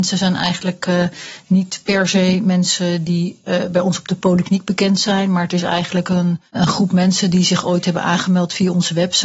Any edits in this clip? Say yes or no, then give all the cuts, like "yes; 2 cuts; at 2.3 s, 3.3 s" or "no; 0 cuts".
yes; 1 cut; at 6.5 s